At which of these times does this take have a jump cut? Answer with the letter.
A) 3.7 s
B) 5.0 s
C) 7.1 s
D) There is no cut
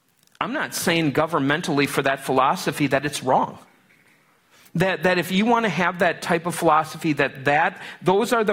D